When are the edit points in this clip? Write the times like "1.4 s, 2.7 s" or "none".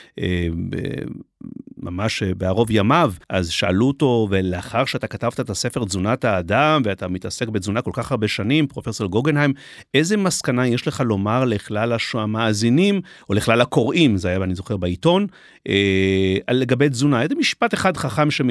3.2 s